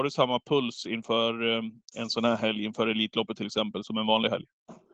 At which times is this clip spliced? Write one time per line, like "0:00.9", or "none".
0:03.8